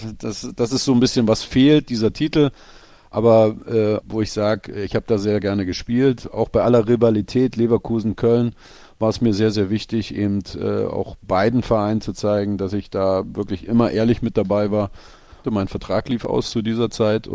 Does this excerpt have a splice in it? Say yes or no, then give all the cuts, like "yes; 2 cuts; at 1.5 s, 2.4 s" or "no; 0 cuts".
yes; 2 cuts; at 4.0 s, 15.4 s